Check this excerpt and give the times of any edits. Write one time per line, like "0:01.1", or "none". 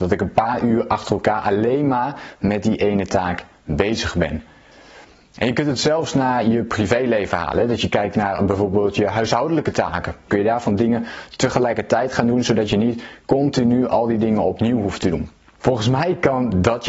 0:10.3
0:15.5